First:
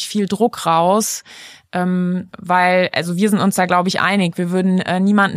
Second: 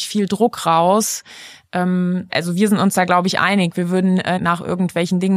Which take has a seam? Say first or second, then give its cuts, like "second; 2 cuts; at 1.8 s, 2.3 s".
second; 2 cuts; at 2.3 s, 4.4 s